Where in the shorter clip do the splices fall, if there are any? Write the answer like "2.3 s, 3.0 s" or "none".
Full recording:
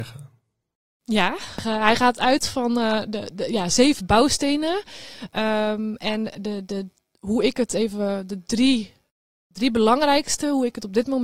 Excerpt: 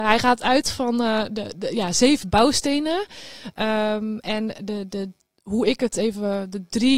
none